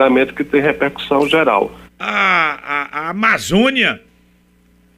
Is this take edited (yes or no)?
yes